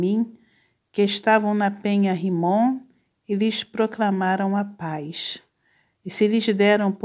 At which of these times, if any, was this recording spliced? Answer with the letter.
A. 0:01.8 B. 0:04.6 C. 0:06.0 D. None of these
C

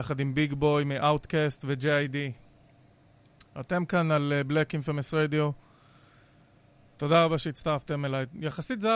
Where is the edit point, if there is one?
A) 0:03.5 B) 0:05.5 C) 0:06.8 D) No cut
D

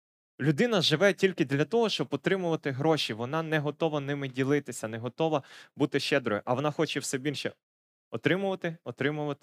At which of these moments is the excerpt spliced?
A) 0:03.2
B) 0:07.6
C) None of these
C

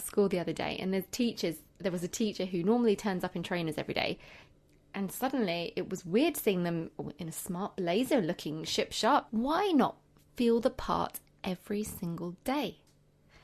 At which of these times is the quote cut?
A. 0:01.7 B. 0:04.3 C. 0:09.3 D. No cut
C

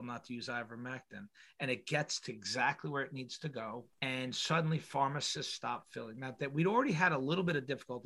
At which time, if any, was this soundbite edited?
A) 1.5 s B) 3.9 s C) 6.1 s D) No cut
B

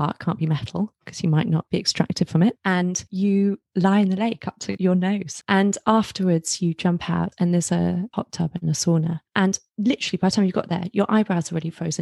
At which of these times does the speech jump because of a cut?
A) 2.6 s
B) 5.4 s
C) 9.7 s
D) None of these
C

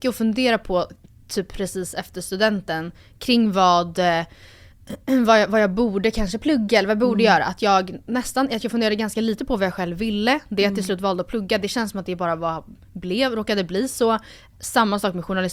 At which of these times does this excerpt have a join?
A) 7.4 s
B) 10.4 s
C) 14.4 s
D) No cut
D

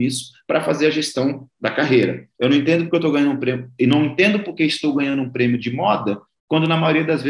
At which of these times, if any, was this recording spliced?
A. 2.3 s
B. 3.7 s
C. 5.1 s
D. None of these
A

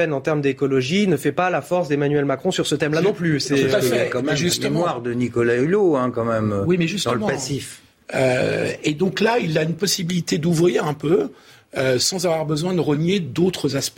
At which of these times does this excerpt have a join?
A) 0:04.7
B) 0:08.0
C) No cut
B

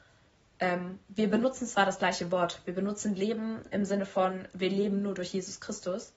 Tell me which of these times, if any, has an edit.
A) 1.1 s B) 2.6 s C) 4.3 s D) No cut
A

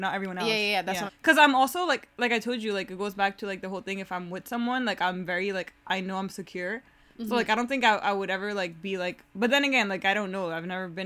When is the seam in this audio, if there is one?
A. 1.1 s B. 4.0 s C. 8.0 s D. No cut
A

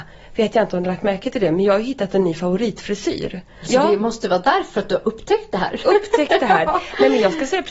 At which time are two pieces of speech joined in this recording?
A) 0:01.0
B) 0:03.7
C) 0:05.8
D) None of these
B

